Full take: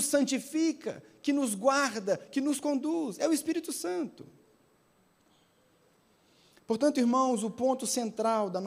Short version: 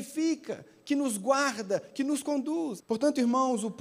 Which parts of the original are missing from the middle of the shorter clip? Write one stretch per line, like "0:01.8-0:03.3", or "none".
0:03.2-0:06.6